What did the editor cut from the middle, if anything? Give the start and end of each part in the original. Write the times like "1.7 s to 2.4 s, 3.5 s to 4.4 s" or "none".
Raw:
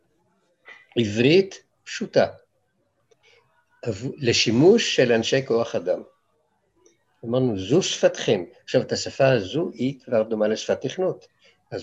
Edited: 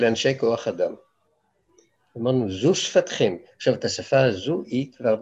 none